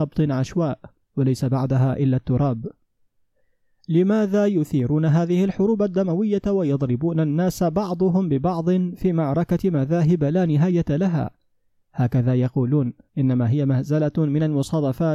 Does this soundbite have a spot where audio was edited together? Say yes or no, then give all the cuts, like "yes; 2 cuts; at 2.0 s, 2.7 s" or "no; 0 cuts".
yes; 2 cuts; at 11.8 s, 13.1 s